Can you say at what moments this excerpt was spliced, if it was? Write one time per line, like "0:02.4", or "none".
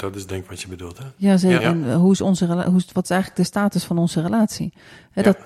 0:01.6